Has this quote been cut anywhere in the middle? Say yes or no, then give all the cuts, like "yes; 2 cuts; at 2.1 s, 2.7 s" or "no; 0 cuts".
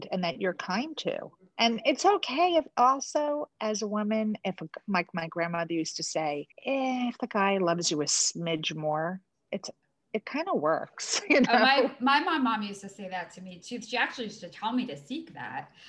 yes; 1 cut; at 6.5 s